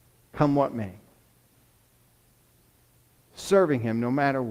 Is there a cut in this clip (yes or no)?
no